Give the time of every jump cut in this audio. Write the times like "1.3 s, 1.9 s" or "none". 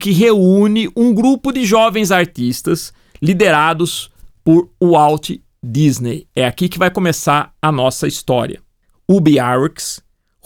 8.9 s